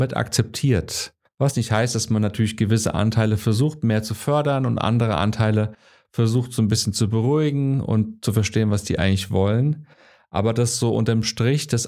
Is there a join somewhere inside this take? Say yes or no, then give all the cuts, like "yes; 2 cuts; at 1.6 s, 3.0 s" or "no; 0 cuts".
no; 0 cuts